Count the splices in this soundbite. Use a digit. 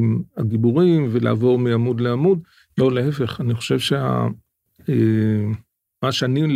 1